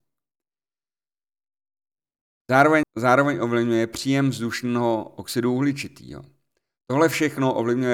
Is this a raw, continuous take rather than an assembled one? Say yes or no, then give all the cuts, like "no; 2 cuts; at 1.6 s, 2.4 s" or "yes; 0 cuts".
no; 1 cut; at 2.8 s